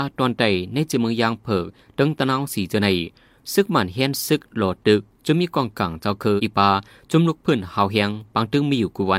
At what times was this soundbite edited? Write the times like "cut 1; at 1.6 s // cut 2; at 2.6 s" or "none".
cut 1; at 6.4 s